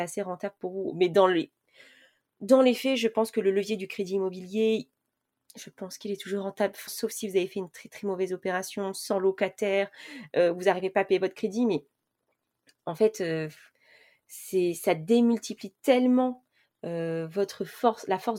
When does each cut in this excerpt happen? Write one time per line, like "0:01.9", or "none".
0:06.9